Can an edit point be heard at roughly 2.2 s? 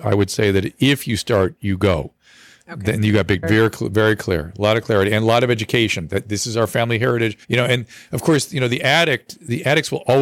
no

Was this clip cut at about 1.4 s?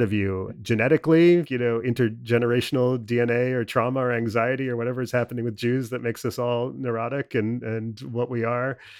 yes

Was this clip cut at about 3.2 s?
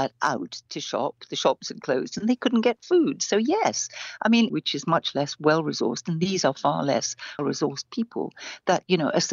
no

